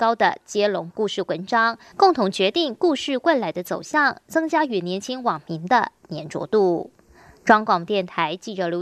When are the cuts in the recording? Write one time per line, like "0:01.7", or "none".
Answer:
0:01.9